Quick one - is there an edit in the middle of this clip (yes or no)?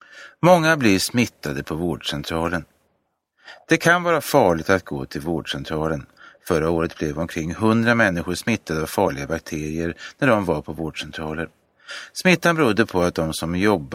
no